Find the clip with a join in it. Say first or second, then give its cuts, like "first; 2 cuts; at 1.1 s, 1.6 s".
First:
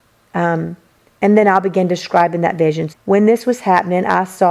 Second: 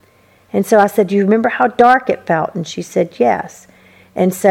first; 1 cut; at 2.9 s